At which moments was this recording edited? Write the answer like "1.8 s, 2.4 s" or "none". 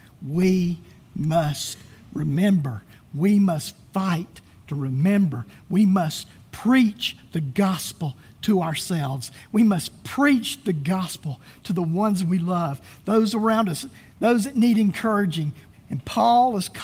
15.7 s